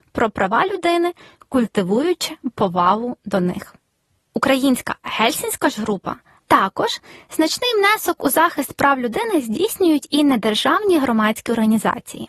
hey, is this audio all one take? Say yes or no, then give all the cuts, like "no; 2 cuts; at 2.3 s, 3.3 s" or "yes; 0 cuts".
no; 2 cuts; at 4.2 s, 6.4 s